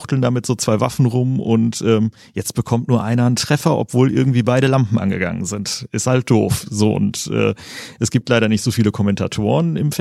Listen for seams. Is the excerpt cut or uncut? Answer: uncut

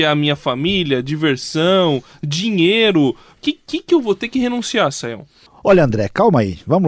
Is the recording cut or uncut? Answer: uncut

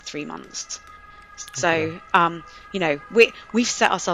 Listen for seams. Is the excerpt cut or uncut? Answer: uncut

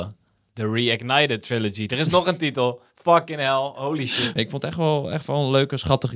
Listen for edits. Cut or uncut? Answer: cut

